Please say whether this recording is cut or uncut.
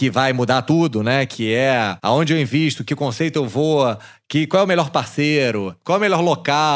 uncut